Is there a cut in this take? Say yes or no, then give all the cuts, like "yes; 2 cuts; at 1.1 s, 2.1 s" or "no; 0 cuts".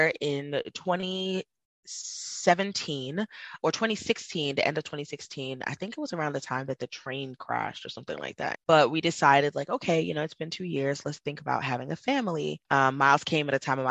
yes; 2 cuts; at 8.5 s, 12.6 s